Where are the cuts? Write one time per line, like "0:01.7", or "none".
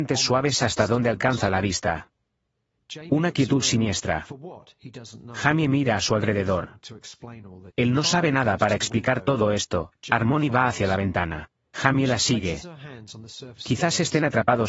0:07.7
0:13.6